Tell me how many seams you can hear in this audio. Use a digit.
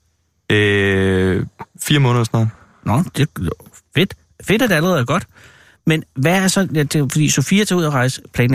0